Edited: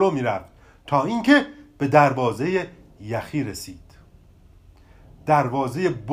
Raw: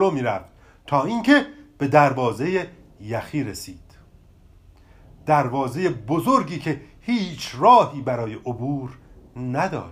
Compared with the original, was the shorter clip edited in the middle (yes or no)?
no